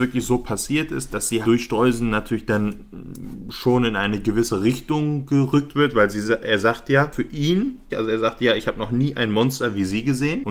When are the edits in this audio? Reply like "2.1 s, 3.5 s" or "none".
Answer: 1.4 s, 7.9 s